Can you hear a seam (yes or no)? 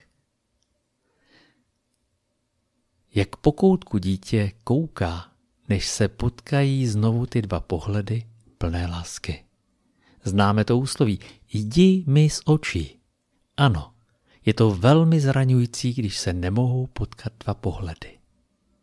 no